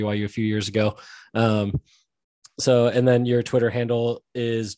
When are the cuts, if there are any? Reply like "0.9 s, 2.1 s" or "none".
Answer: none